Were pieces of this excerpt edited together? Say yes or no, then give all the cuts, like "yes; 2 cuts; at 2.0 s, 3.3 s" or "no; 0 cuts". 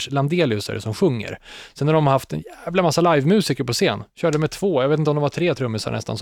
no; 0 cuts